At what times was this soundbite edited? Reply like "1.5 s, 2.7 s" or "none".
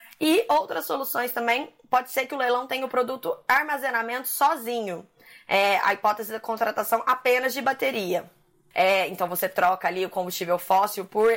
8.7 s